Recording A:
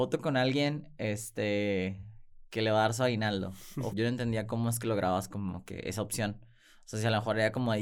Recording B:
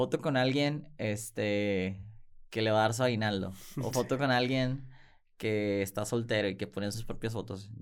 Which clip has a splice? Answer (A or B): A